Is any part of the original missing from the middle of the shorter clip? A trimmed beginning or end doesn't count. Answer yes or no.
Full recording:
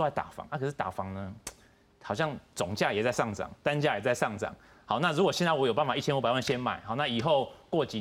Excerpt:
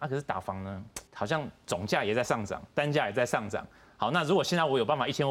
yes